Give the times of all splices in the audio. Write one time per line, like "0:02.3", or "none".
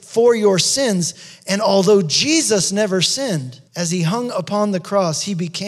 0:03.7

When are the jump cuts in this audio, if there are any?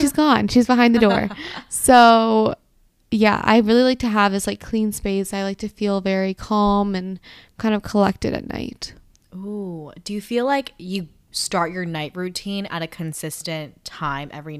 none

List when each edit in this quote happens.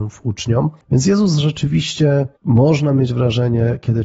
0:02.4

